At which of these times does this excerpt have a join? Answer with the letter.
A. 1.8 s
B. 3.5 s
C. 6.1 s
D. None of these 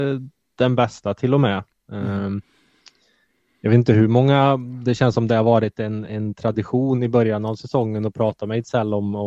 D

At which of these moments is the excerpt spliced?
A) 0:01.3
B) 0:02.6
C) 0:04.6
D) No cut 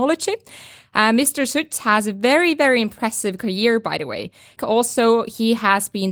C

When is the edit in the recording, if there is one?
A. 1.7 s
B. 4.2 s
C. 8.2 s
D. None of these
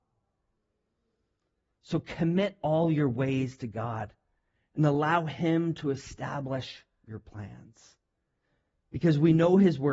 A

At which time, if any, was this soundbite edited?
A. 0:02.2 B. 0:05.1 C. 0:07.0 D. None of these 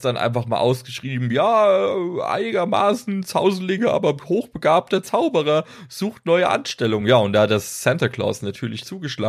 D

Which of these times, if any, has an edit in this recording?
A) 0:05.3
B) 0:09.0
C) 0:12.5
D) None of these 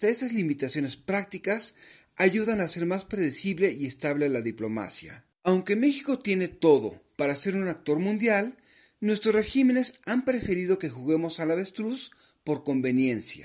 A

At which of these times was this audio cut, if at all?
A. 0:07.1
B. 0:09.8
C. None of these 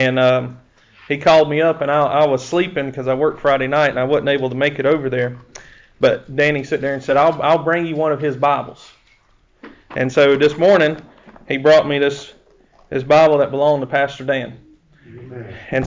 C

